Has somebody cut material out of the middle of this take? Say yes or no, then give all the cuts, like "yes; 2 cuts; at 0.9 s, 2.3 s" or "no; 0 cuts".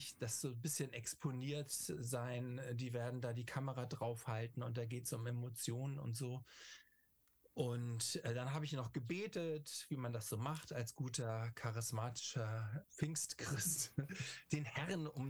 yes; 1 cut; at 12.8 s